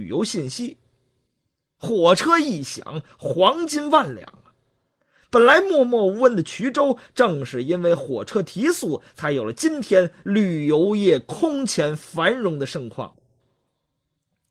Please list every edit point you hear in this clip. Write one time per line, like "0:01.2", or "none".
none